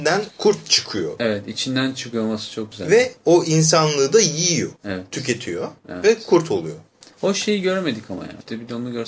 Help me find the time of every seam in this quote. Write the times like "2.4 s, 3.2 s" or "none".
none